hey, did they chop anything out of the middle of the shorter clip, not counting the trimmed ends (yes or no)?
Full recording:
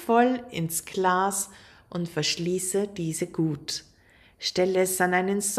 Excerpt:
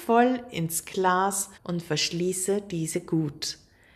yes